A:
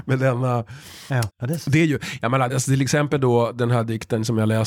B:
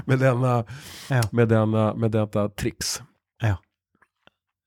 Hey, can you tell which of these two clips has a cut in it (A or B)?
A